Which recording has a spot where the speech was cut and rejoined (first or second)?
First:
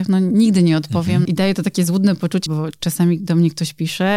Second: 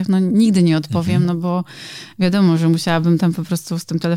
first